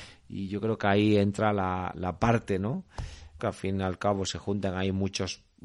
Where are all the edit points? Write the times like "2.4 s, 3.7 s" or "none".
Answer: 1.9 s, 3.4 s